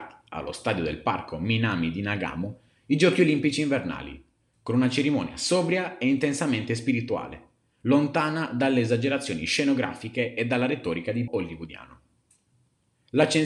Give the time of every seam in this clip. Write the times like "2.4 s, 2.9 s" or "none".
11.3 s